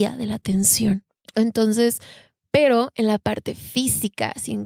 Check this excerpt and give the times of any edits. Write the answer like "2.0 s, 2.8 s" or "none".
1.2 s